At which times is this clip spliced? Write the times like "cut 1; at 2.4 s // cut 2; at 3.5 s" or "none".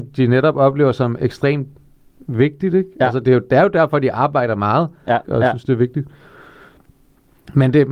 cut 1; at 5.2 s